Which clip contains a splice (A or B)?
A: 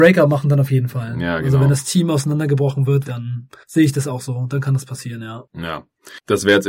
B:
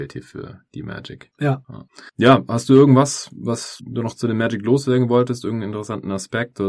A